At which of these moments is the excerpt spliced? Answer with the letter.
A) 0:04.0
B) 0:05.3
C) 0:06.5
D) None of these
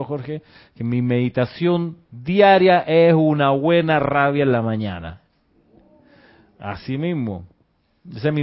D